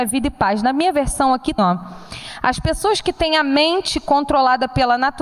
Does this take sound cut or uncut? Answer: cut